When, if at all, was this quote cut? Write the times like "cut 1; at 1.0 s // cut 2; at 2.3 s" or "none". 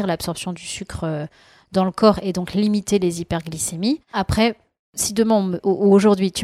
cut 1; at 4.1 s